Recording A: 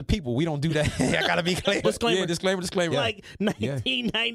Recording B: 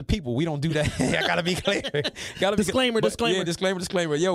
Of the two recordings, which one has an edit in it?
A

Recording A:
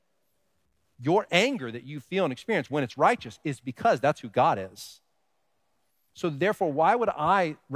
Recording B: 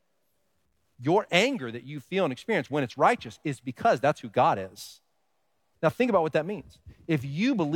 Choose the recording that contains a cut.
B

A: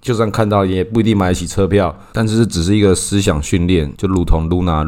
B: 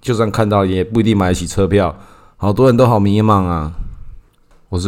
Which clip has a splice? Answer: A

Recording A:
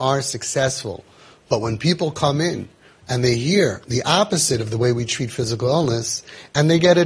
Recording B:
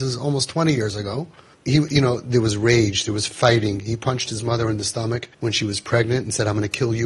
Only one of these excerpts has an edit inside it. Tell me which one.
B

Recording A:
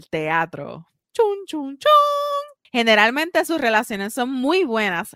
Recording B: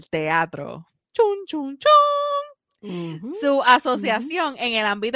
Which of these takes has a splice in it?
A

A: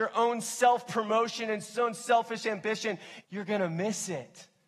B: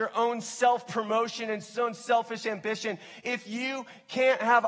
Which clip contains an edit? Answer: A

